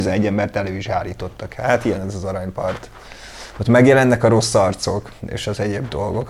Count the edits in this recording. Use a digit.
0